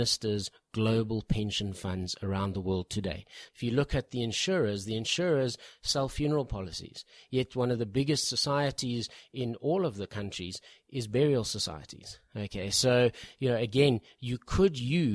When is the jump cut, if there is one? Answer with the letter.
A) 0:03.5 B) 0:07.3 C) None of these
A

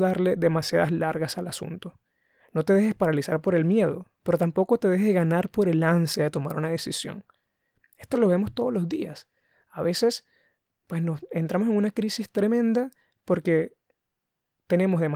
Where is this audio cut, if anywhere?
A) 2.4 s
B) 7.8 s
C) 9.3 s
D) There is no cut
D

